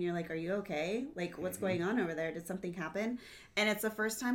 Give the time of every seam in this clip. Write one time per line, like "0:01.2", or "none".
none